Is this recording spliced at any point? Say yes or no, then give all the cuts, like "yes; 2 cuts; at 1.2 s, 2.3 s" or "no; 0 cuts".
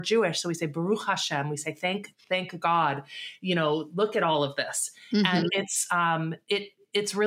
no; 0 cuts